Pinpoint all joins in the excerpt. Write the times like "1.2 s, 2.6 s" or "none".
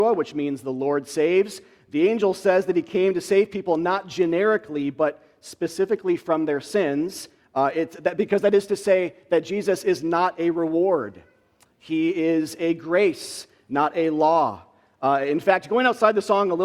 7.4 s